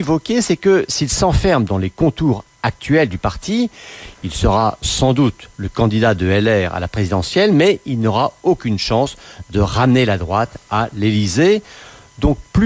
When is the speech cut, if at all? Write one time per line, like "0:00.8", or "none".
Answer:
none